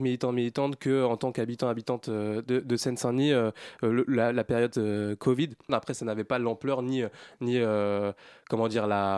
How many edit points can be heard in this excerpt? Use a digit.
1